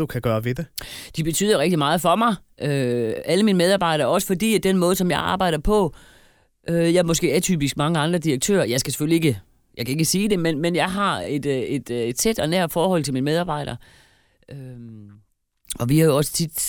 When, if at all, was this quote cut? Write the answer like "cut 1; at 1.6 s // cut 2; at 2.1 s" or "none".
none